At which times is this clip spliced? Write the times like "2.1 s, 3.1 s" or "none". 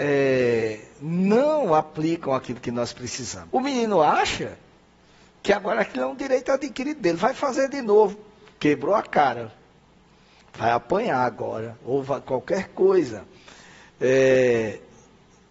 3.5 s